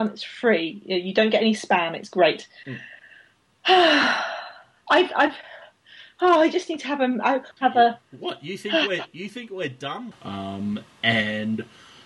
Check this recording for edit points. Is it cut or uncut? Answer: cut